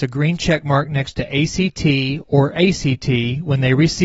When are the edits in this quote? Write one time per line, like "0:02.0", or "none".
none